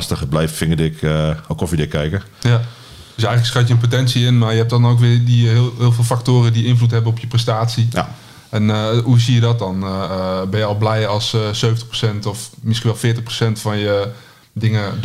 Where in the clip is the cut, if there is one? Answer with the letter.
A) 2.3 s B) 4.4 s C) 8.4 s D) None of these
D